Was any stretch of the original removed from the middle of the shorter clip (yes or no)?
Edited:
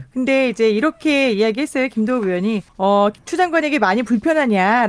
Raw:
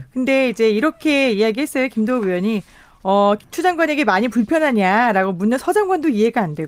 yes